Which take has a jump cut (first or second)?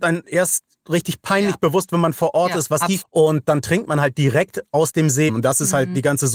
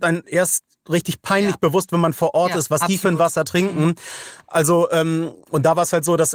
first